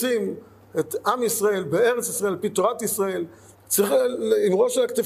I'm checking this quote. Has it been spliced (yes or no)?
yes